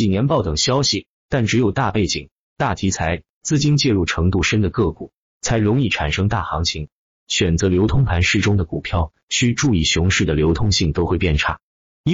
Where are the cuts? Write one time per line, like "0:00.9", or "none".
0:07.2